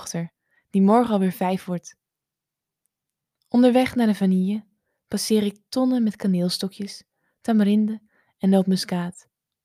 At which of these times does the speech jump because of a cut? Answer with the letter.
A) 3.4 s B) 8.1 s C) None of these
C